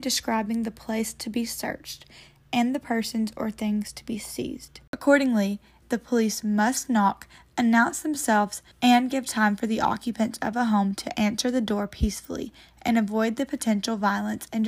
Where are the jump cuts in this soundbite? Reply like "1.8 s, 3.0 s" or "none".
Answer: 5.8 s, 8.7 s

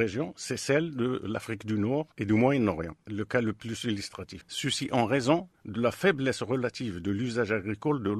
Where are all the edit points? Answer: 4.4 s

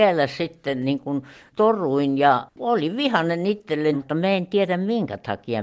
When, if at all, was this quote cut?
3.9 s

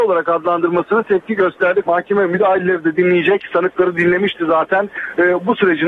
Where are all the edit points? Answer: 1.8 s

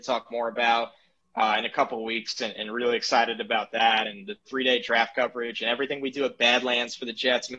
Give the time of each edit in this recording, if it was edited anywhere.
none

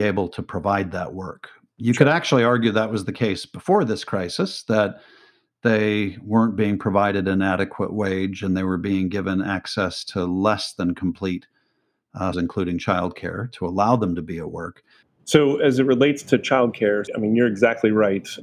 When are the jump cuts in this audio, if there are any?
12.3 s, 15.0 s

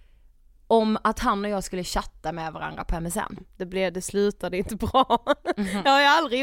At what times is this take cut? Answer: 3.4 s

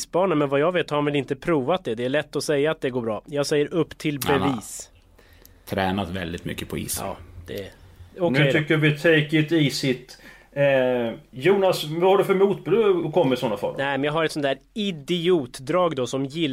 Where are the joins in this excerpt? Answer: none

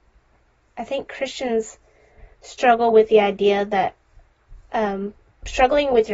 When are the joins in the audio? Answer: none

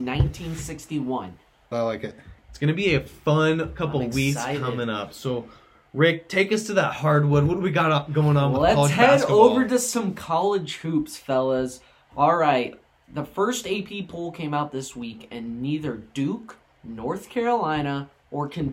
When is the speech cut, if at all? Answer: 1.7 s

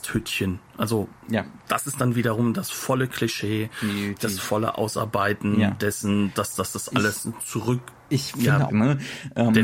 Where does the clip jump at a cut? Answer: 6.3 s, 8.7 s

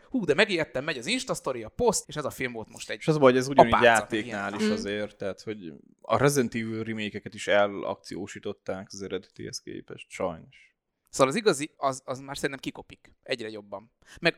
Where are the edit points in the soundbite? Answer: 2.0 s, 11.7 s

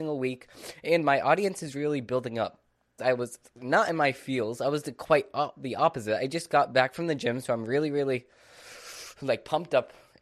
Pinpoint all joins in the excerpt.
3.0 s

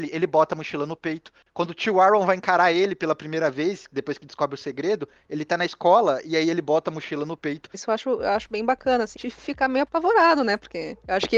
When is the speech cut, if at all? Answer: 7.7 s, 9.1 s

